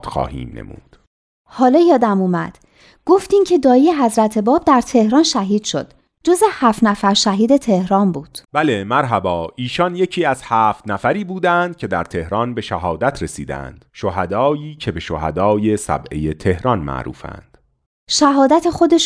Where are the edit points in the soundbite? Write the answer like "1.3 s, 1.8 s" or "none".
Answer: 8.4 s, 13.9 s